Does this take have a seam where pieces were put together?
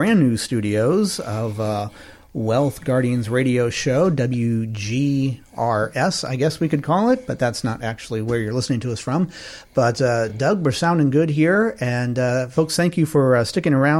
no; 0 cuts

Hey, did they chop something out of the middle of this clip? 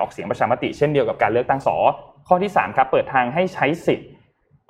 yes; 1 cut; at 1.6 s

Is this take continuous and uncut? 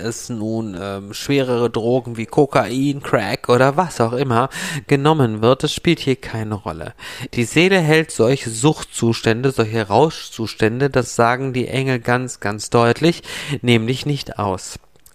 no; 1 cut; at 7.3 s

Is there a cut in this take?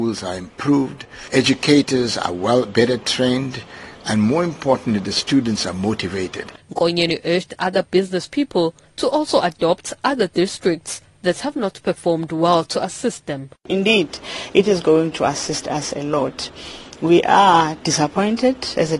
yes; 2 cuts; at 1.3 s, 6.6 s

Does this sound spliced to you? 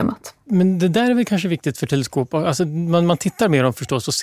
no; 0 cuts

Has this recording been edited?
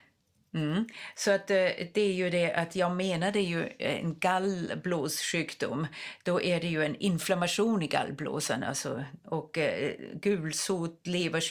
no; 0 cuts

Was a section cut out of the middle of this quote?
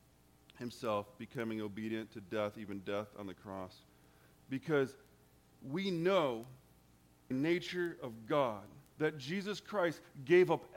yes; 3 cuts; at 4.4 s, 7.3 s, 8.9 s

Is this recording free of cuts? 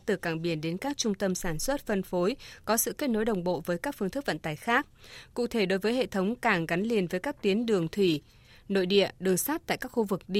yes; 0 cuts

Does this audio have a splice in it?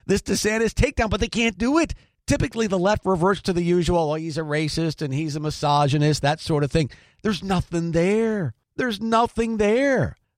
no; 0 cuts

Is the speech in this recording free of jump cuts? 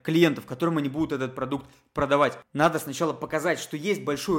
no; 1 cut; at 2.4 s

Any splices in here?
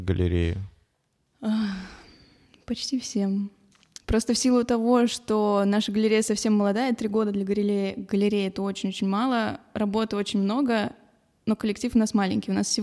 no; 0 cuts

